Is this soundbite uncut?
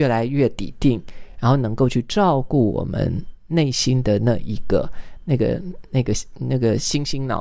yes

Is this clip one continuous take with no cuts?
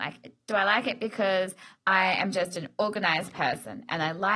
yes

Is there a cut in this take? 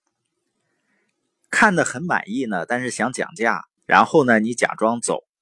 yes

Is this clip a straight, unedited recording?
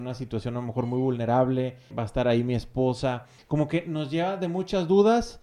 no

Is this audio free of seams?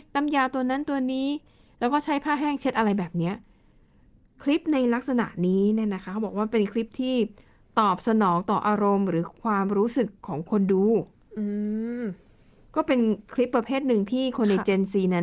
yes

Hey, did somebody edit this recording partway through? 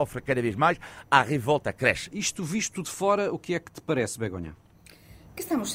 yes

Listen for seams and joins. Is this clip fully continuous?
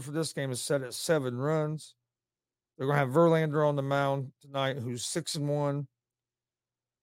no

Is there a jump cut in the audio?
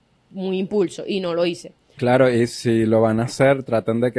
yes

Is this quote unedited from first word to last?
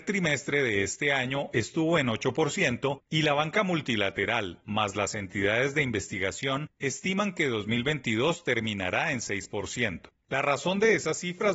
yes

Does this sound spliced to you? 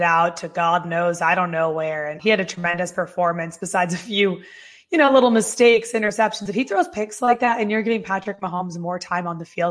yes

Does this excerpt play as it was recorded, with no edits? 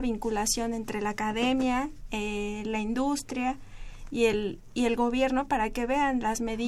yes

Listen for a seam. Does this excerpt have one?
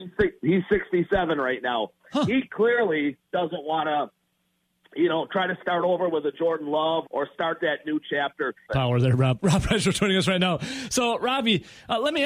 yes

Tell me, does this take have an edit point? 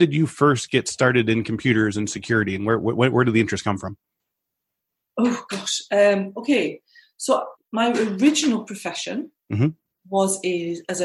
yes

